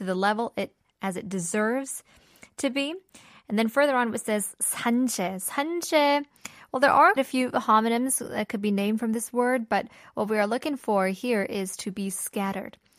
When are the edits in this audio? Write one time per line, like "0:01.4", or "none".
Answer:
0:07.2